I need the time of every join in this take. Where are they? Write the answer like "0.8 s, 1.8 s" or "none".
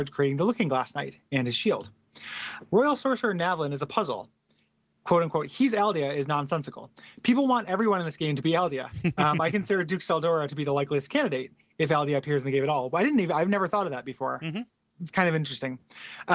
none